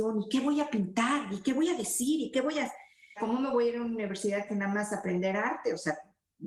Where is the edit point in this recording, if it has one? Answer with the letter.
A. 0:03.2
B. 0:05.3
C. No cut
A